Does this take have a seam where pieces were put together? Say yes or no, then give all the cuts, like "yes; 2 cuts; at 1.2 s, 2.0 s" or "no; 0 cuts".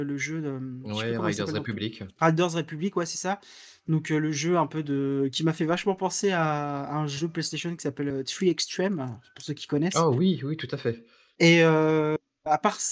no; 0 cuts